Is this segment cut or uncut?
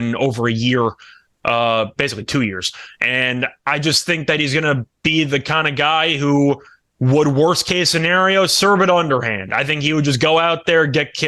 uncut